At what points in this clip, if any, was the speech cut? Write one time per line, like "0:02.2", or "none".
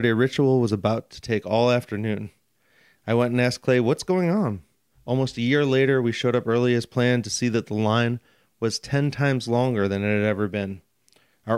0:04.9